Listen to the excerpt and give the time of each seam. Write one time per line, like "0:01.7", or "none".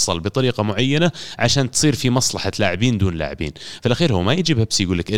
none